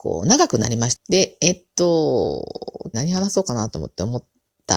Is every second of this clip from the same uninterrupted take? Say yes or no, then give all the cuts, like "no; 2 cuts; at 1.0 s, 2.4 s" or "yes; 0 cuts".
no; 2 cuts; at 0.9 s, 2.9 s